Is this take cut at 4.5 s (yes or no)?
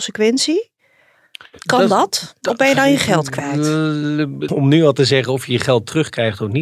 yes